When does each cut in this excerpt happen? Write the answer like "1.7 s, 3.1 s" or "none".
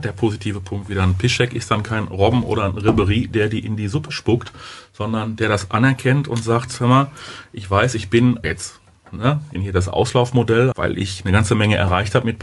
8.4 s, 9.5 s, 10.7 s